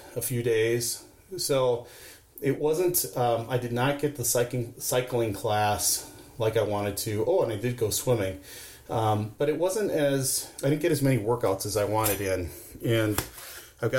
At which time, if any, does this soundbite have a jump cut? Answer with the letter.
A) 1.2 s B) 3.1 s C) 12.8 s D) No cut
D